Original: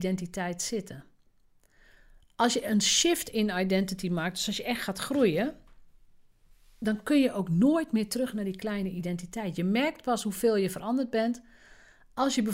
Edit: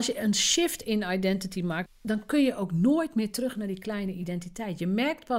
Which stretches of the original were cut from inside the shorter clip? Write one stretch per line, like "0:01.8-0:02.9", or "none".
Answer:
0:04.3-0:06.6